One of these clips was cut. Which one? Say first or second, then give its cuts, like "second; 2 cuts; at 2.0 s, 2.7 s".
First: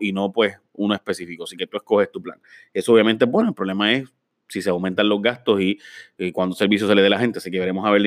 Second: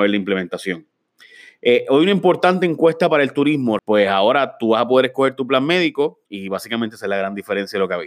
second; 2 cuts; at 3.8 s, 6.3 s